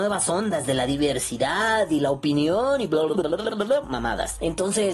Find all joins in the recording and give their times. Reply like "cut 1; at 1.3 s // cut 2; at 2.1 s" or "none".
cut 1; at 3.1 s